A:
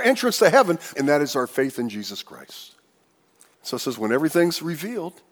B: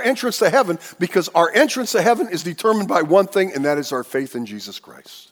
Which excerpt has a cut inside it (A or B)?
A